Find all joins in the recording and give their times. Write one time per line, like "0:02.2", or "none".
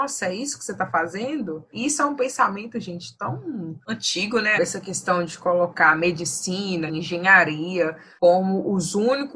0:01.7
0:04.5
0:06.9